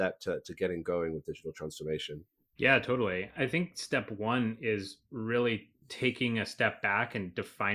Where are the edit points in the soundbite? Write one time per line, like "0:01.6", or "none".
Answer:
0:05.8